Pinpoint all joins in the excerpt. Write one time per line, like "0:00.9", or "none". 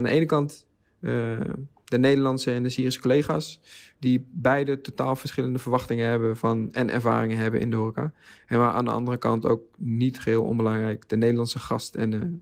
none

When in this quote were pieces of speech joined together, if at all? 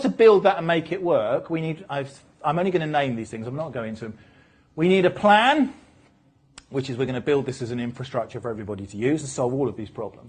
none

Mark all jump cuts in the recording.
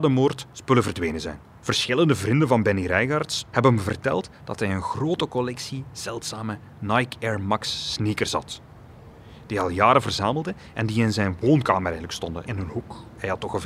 0:03.5
0:12.4

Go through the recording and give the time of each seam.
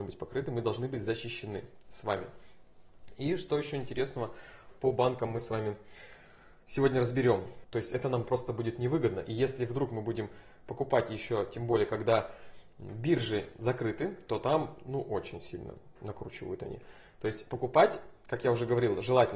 0:07.6

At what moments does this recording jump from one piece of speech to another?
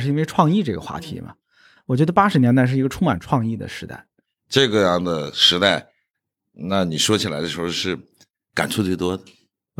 0:04.2

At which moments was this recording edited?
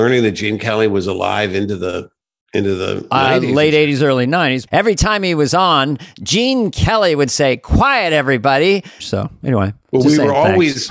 0:04.7
0:09.0

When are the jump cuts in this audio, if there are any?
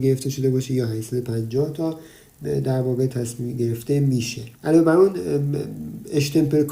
0:04.6

